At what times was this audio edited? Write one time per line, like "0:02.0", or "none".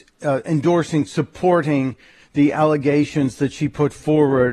0:01.1